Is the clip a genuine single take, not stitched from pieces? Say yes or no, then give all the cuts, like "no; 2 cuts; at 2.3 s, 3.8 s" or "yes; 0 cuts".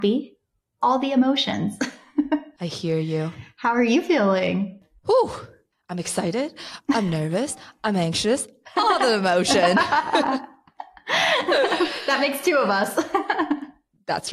yes; 0 cuts